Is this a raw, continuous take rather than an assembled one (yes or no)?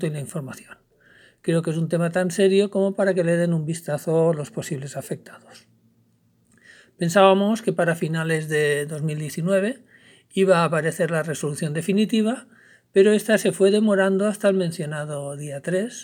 yes